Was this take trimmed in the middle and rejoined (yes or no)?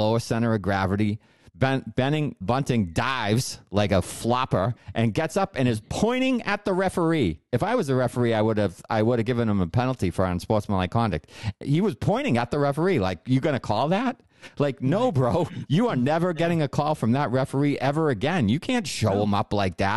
yes